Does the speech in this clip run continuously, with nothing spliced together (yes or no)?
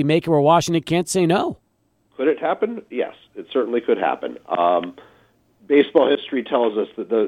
yes